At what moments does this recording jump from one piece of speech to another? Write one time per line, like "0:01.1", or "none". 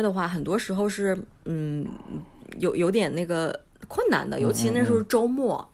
none